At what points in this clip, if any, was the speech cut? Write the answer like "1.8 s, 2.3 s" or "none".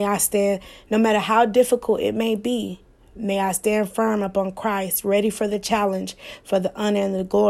none